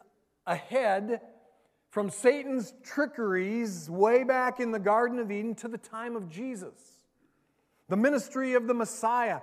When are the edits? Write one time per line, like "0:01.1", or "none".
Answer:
none